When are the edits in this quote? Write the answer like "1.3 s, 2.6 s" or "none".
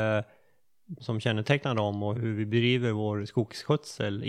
1.0 s, 2.1 s